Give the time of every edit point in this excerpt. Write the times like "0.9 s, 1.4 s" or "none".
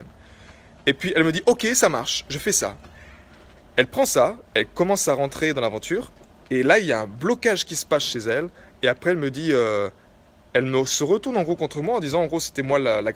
none